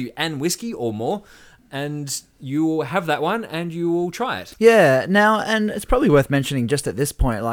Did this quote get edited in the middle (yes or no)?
no